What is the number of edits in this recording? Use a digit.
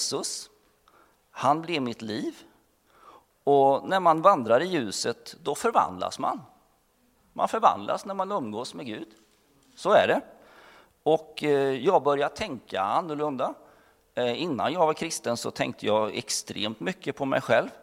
0